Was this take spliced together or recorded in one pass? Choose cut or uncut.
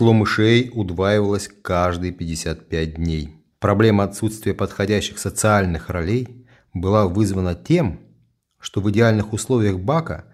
cut